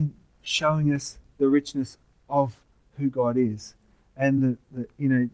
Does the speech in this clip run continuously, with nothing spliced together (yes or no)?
yes